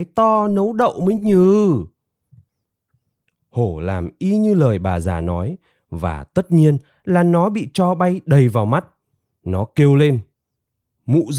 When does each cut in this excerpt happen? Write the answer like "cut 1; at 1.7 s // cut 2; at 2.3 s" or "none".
none